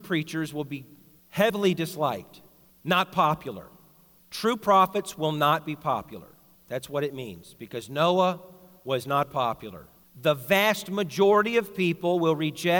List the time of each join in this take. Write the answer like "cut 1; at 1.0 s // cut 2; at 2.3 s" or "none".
none